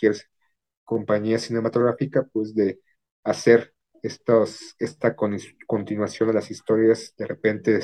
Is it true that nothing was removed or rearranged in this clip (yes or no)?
yes